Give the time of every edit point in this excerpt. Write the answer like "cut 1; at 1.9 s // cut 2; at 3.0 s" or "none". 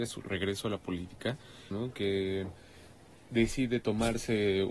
cut 1; at 1.7 s